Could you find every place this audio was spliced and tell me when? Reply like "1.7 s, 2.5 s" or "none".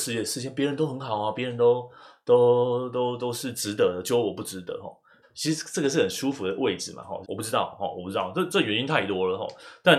1.4 s, 5.2 s, 7.2 s